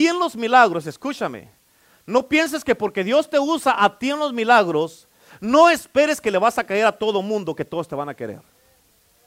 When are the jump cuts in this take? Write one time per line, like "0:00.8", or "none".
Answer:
none